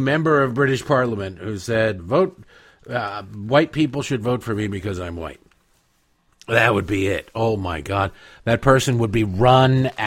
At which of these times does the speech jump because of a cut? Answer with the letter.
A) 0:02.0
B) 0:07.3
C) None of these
A